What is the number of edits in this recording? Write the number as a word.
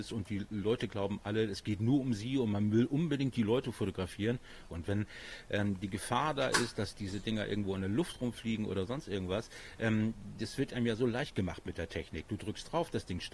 one